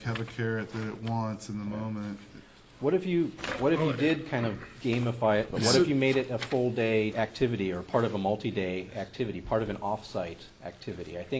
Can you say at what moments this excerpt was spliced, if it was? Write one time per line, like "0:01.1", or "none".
0:05.5

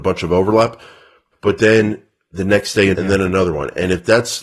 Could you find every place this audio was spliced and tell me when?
0:01.3
0:02.9

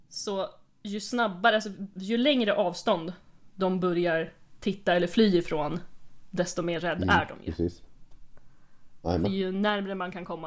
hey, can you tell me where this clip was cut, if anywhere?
none

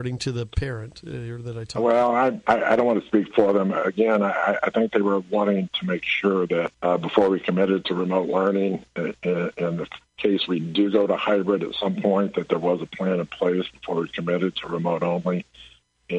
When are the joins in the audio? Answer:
0:06.7
0:10.1

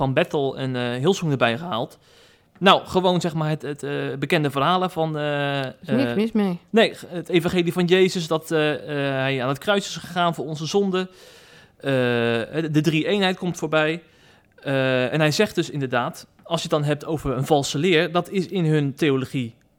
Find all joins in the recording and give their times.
0:03.6

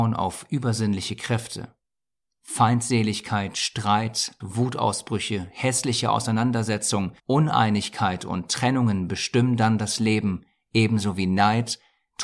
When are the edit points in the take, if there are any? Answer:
0:04.4
0:07.2

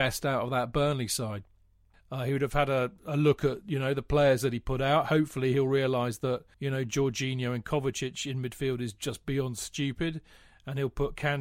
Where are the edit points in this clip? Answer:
0:01.9
0:06.5

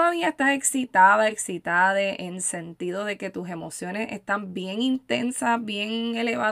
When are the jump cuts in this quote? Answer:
0:01.3

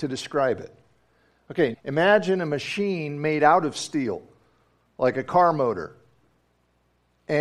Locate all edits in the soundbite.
0:01.7

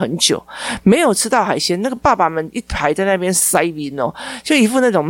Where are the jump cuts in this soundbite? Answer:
none

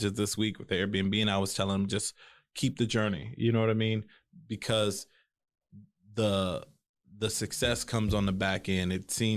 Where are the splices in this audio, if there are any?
none

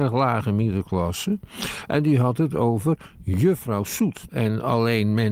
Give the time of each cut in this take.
0:04.3

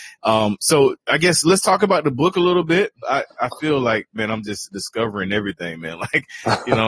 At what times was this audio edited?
0:03.0

